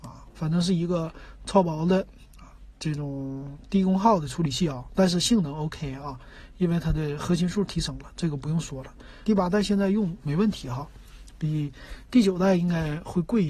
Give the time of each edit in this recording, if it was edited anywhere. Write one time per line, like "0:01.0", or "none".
0:09.2